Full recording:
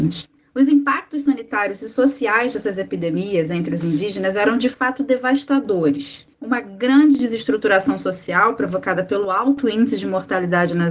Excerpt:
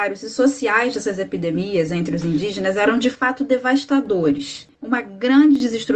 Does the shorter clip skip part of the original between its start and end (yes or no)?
no